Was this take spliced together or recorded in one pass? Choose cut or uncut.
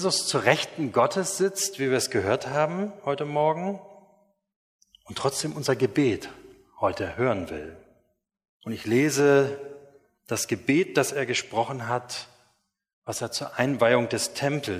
cut